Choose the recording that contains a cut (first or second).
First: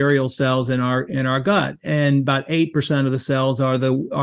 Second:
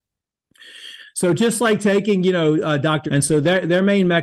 second